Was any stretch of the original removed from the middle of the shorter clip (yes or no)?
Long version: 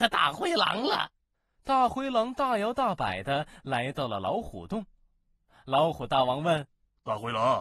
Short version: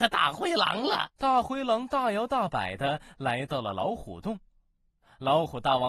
yes